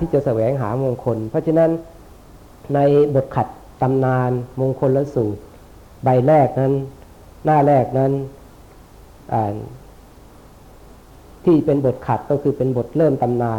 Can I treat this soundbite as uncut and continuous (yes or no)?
yes